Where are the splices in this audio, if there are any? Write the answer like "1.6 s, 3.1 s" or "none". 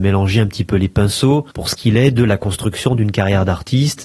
1.5 s